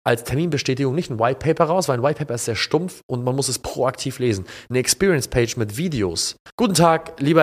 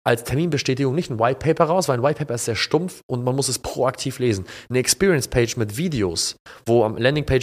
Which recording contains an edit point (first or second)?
first